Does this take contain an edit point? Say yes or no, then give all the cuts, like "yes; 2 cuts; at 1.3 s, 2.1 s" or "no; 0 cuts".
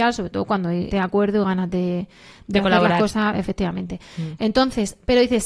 yes; 1 cut; at 0.9 s